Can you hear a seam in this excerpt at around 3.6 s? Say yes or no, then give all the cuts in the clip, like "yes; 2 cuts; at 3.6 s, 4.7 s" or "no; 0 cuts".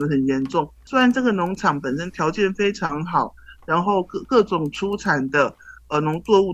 no; 0 cuts